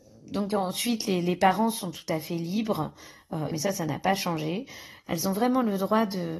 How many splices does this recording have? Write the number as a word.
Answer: two